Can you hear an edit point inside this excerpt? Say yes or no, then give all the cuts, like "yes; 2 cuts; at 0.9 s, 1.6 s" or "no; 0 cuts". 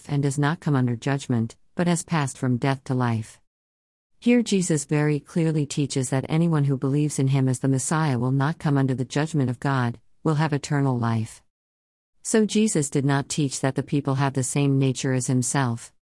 no; 0 cuts